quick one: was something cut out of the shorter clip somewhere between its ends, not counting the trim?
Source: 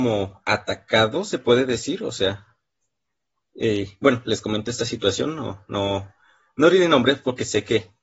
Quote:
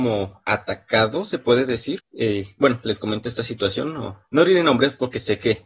yes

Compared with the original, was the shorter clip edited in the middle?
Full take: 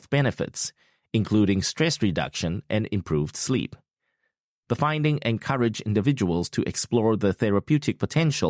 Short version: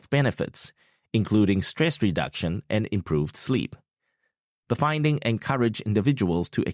no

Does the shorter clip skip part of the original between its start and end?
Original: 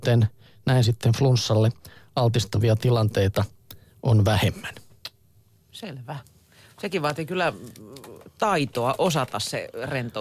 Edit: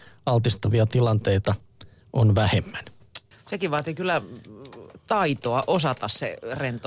yes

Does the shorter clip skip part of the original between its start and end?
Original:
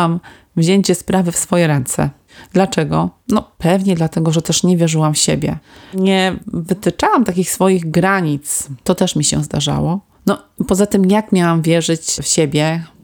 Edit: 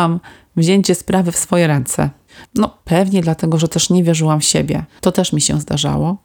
yes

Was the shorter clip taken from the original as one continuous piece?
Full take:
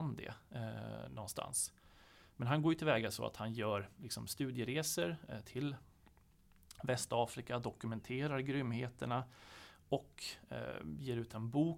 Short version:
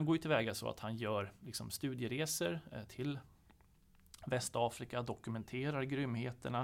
yes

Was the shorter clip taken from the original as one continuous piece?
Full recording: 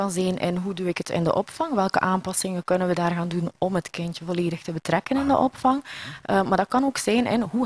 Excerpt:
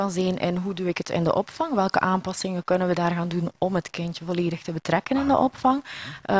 yes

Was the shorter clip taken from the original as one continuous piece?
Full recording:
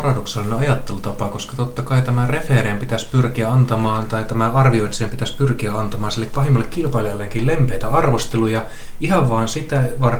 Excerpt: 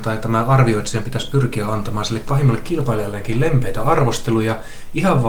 yes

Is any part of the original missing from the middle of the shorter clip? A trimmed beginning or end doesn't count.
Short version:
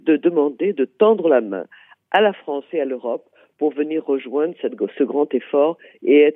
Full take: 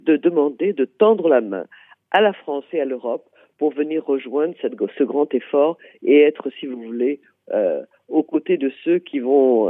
no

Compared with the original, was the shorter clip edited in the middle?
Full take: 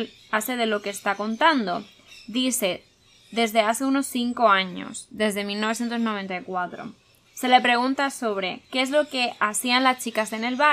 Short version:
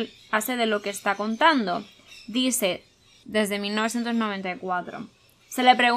yes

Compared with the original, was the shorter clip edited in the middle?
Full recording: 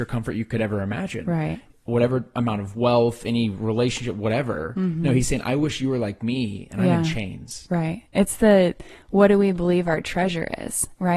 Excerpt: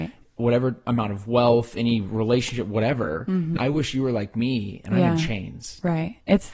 yes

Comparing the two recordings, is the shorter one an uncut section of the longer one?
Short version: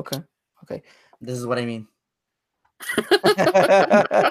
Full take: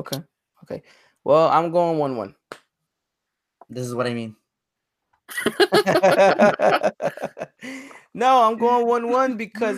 no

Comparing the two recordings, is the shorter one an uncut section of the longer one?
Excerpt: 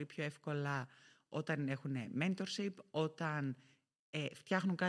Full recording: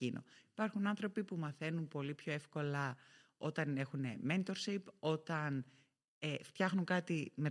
yes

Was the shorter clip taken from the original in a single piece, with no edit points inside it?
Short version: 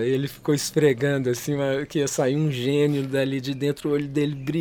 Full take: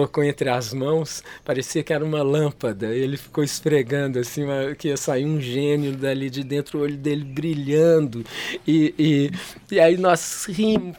yes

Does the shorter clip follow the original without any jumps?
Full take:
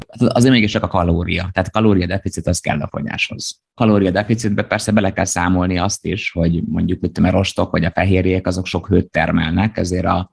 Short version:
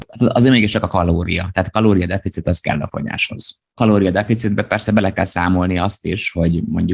yes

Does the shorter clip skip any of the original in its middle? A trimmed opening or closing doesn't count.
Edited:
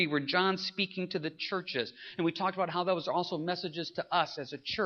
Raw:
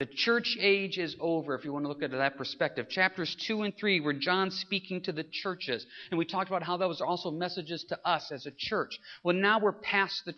no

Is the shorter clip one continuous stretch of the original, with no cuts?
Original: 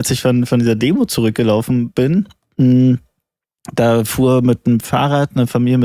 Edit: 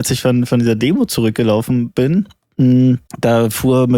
no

